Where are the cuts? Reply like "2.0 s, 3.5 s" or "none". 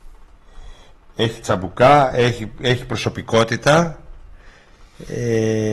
none